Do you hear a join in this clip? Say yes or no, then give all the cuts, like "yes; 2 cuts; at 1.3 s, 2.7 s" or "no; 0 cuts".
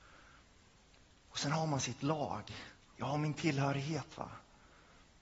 yes; 1 cut; at 3.0 s